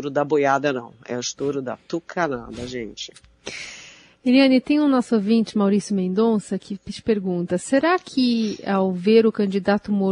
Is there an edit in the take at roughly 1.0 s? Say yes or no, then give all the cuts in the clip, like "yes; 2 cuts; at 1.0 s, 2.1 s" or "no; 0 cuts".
no; 0 cuts